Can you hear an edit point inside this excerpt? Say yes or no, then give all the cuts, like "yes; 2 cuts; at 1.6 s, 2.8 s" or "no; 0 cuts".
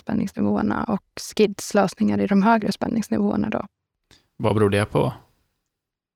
no; 0 cuts